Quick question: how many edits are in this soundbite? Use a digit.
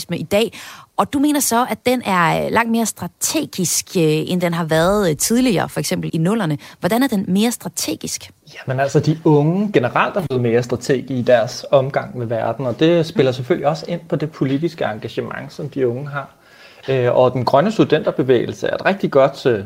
1